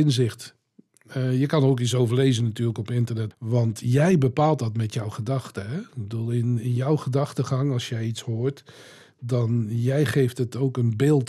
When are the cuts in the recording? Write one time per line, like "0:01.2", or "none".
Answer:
0:03.3